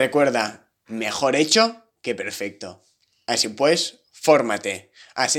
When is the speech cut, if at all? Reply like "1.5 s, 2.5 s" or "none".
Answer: 3.2 s